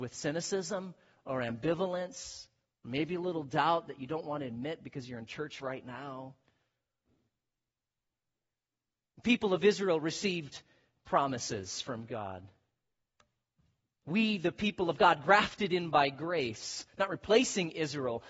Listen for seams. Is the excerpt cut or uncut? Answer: uncut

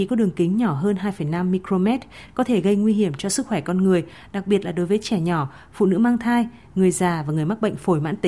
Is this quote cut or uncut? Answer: uncut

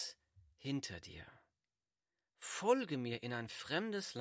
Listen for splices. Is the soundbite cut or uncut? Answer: uncut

